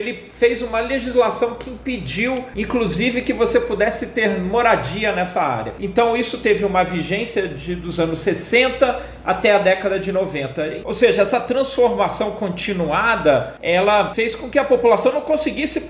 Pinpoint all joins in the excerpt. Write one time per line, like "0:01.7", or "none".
0:10.8